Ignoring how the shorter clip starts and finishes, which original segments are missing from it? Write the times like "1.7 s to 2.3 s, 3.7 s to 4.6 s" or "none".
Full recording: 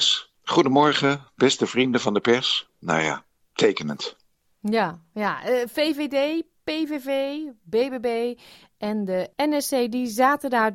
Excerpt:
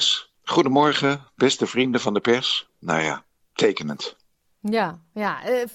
none